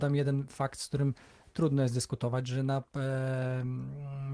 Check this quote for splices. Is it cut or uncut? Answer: uncut